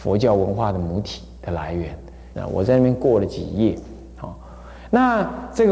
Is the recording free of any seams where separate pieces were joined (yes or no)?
no